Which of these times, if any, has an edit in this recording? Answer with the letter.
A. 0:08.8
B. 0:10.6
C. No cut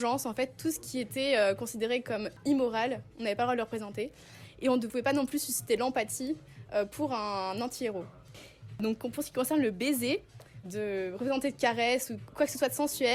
B